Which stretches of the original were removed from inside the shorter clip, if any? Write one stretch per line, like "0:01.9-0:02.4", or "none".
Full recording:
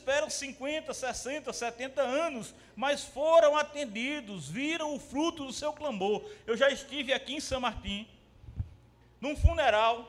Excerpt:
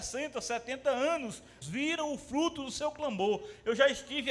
0:02.7-0:04.4